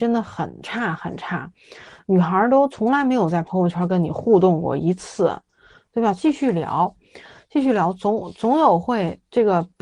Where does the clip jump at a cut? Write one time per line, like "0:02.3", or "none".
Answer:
0:06.2

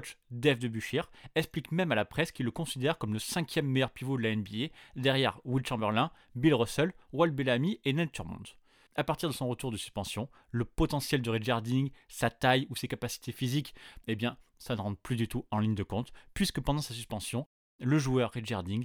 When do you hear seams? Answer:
0:08.9
0:14.0

